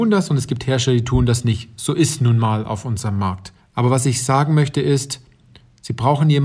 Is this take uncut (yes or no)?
no